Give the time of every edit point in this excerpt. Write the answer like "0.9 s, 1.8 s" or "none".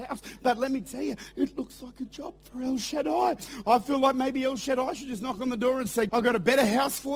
6.1 s